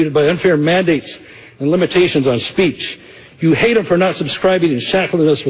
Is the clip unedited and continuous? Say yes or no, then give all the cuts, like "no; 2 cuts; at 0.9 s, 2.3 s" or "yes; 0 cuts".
yes; 0 cuts